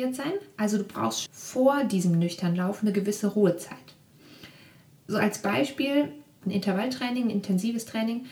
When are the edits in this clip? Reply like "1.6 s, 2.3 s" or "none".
1.3 s, 6.4 s

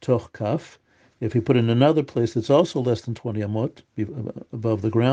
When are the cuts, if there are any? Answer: none

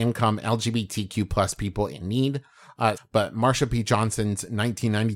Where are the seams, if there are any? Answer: 3.0 s

